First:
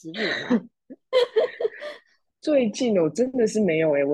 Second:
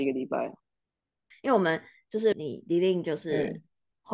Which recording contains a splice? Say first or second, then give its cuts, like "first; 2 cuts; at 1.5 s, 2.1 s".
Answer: second; 2 cuts; at 1.3 s, 2.3 s